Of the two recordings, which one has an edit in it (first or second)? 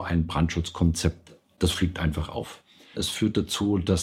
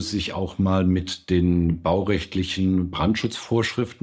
first